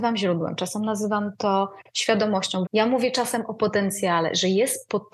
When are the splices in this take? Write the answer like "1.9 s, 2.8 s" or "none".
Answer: 2.7 s